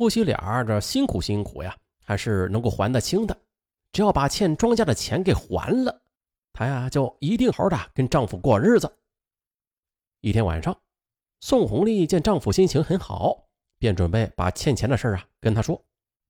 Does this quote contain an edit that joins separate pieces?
yes; 1 cut; at 7.5 s

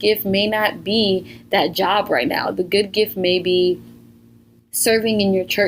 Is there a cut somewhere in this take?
no; 0 cuts

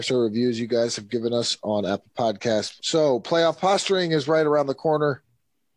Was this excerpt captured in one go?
no; 1 cut; at 2.8 s

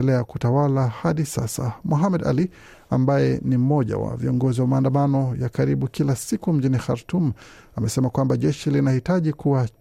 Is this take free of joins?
yes; 0 cuts

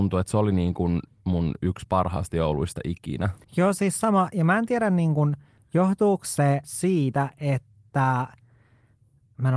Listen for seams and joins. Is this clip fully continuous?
no; 2 cuts; at 3.4 s, 6.6 s

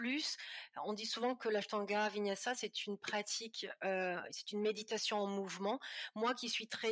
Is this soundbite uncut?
yes; 0 cuts

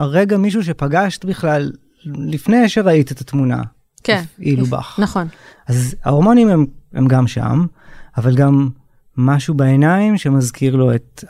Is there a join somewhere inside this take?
no; 0 cuts

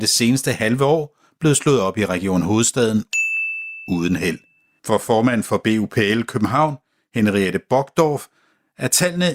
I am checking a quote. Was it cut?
yes; 1 cut; at 4.8 s

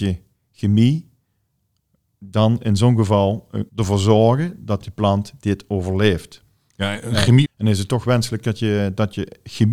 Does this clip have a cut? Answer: yes; 2 cuts; at 3.7 s, 7.4 s

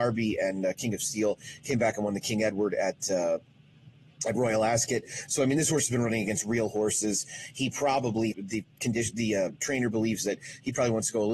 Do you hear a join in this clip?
yes; 2 cuts; at 8.3 s, 9.6 s

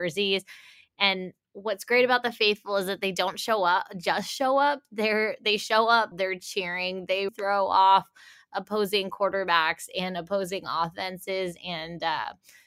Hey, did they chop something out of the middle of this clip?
yes; 2 cuts; at 6.1 s, 7.3 s

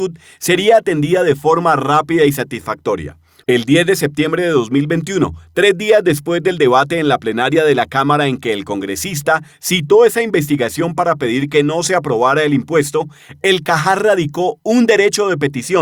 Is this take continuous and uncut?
no; 1 cut; at 3.4 s

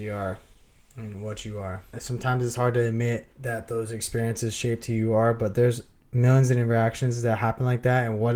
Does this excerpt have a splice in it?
yes; 2 cuts; at 1.9 s, 3.3 s

